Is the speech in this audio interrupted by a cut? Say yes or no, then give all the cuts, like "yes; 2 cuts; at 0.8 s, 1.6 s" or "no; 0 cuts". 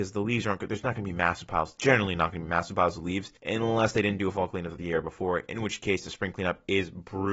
yes; 1 cut; at 3.4 s